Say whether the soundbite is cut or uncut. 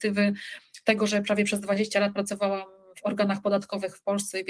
uncut